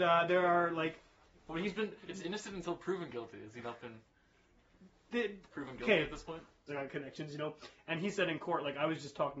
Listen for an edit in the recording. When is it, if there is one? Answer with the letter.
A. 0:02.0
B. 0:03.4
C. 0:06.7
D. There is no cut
C